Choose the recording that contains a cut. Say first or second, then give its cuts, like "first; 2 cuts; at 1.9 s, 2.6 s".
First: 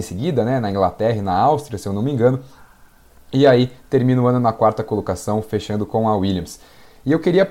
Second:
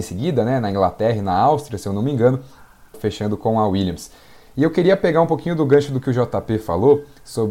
second; 1 cut; at 2.9 s